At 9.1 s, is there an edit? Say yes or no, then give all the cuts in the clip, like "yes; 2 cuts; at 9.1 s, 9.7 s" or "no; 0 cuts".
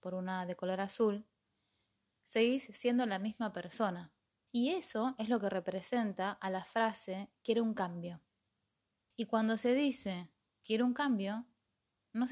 yes; 2 cuts; at 4.5 s, 9.1 s